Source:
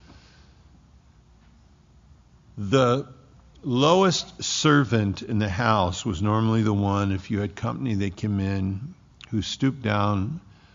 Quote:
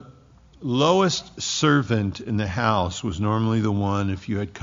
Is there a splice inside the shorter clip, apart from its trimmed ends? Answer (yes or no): no